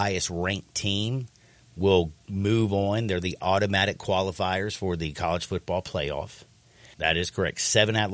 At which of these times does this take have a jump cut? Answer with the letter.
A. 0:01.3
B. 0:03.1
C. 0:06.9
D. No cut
C